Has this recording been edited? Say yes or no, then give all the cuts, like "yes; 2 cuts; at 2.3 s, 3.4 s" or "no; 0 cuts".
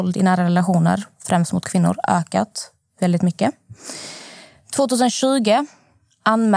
no; 0 cuts